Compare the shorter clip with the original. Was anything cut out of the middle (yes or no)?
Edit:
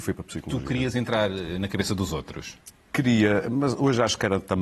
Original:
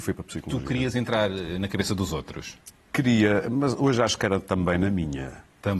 no